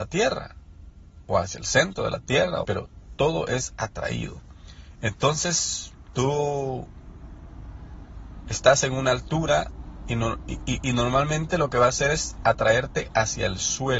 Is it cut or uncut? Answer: cut